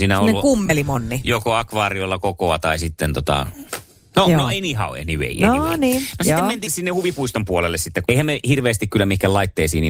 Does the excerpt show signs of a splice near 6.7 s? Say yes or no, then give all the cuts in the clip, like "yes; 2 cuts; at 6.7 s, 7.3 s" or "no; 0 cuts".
yes; 2 cuts; at 6.7 s, 8.1 s